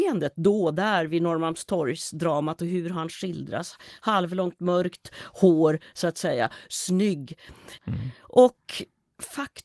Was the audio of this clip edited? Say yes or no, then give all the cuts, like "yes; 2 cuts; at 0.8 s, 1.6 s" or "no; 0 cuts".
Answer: yes; 1 cut; at 7.8 s